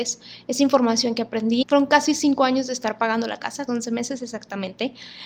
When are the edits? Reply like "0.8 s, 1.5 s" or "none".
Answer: 1.6 s, 3.7 s